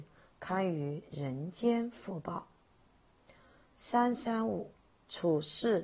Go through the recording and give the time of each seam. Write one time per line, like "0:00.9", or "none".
none